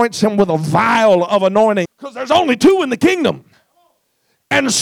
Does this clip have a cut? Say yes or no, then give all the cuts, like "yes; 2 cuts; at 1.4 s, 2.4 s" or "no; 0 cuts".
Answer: yes; 1 cut; at 1.9 s